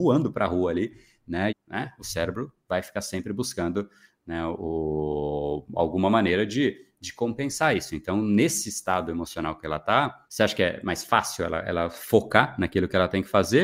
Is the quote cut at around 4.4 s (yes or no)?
no